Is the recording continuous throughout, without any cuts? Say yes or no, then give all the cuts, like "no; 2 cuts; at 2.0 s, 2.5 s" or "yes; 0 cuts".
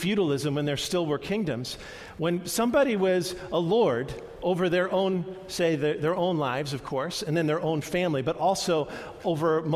yes; 0 cuts